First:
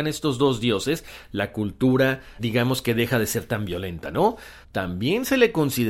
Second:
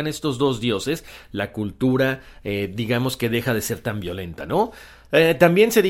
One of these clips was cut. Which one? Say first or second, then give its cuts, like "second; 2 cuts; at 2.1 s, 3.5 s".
first; 2 cuts; at 2.4 s, 4.6 s